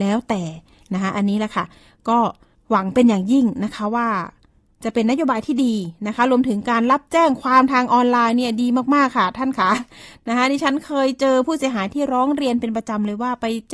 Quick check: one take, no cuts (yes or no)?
yes